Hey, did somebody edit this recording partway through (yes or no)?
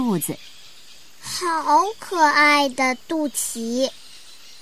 no